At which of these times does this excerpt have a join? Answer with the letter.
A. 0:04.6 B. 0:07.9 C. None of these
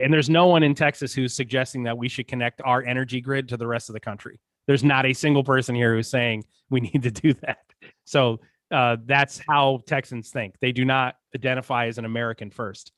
B